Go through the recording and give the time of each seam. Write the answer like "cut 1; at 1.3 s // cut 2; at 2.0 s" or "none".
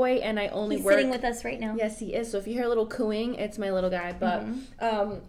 none